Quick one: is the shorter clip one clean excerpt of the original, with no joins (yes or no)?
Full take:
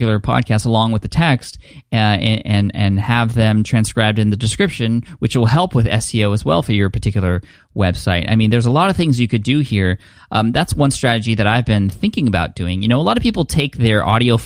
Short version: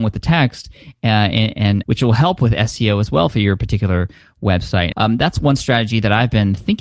no